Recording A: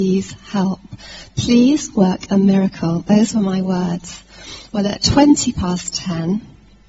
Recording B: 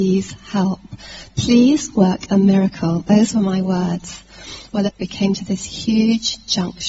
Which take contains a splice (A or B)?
B